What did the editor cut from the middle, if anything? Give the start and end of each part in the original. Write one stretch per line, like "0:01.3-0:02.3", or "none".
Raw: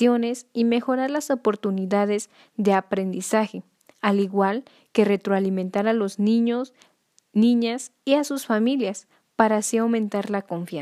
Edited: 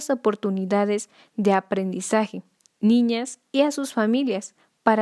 0:03.9-0:07.2